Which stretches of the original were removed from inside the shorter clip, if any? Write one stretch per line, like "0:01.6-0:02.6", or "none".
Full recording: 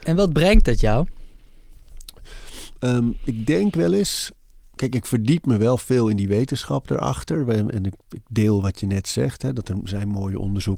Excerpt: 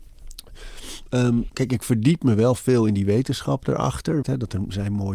0:03.2-0:04.7
0:07.5-0:09.4